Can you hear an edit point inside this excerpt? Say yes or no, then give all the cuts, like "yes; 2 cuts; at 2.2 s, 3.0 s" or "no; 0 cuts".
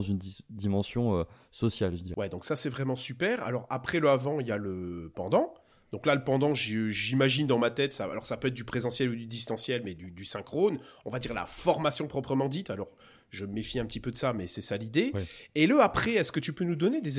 no; 0 cuts